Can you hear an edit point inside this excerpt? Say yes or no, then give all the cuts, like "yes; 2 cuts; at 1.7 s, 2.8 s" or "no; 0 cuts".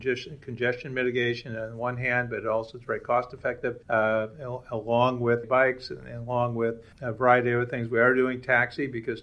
yes; 3 cuts; at 3.8 s, 5.4 s, 6.9 s